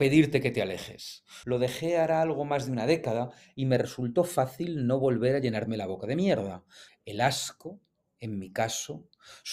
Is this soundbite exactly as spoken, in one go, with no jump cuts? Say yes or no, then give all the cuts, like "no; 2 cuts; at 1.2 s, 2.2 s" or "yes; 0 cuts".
no; 2 cuts; at 1.4 s, 6.9 s